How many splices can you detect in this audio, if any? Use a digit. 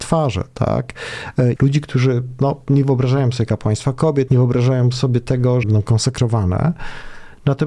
3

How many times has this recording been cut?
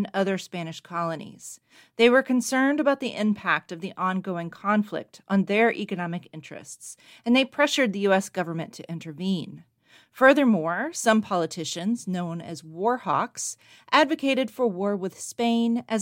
0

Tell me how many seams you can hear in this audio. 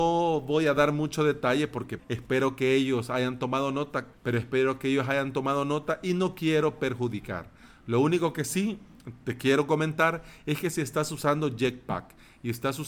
2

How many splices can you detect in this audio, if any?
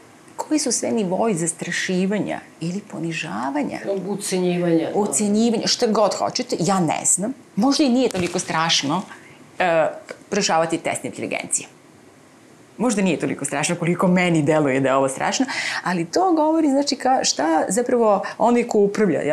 0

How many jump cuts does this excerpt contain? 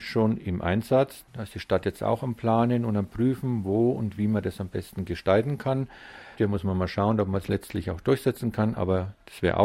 2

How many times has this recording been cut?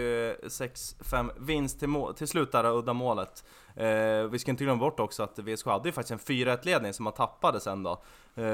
0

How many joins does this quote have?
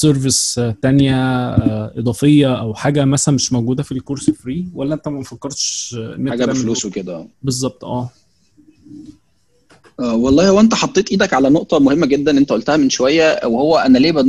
1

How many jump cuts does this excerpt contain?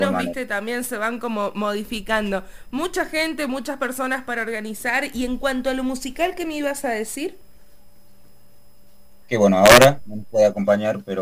1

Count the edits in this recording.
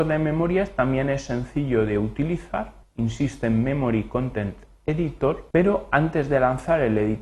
2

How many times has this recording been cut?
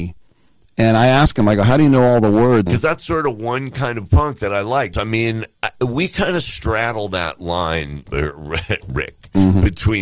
3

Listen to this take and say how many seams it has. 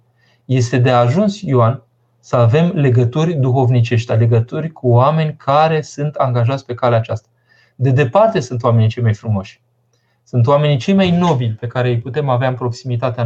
0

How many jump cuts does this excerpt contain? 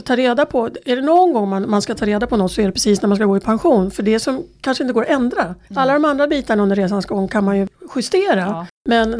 1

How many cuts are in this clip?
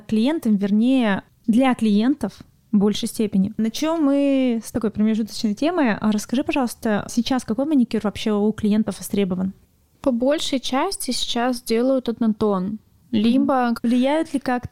1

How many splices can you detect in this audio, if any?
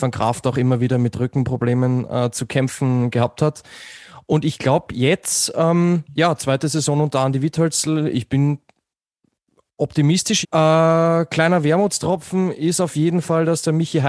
1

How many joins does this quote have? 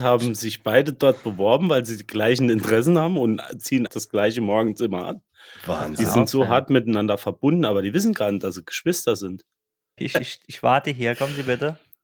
2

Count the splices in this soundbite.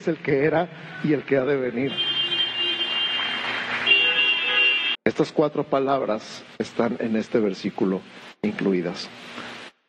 1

